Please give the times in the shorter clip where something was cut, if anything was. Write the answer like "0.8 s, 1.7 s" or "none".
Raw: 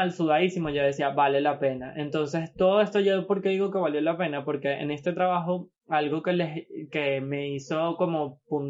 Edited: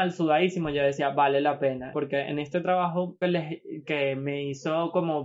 1.9 s, 3.2 s